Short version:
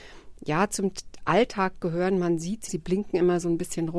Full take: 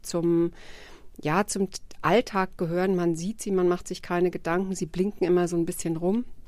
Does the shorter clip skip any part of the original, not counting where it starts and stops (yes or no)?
yes